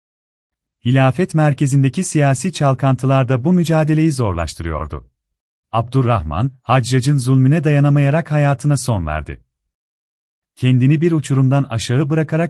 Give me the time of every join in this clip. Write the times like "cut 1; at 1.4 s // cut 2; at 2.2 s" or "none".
cut 1; at 5.6 s